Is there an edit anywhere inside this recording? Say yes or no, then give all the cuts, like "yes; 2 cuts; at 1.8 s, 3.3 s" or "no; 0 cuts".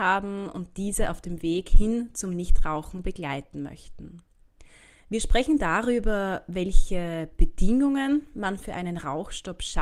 yes; 1 cut; at 5.0 s